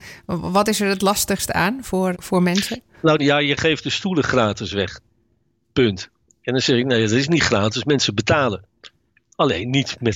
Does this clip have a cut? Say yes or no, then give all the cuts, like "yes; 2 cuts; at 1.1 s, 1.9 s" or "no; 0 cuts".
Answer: yes; 2 cuts; at 2.1 s, 3.2 s